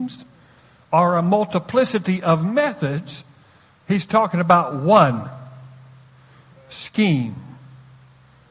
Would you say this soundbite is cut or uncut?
uncut